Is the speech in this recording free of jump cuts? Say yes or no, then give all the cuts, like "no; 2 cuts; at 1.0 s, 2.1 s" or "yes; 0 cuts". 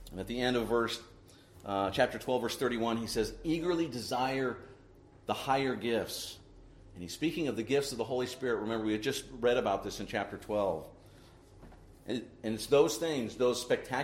yes; 0 cuts